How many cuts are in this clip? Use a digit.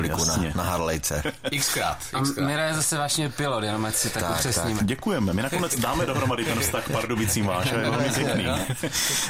1